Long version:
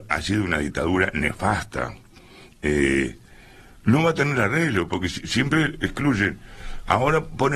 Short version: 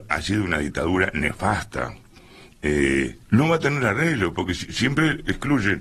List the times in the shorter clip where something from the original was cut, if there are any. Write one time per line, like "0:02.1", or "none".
0:03.2